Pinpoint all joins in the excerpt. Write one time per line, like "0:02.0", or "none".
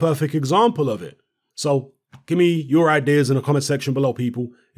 0:01.5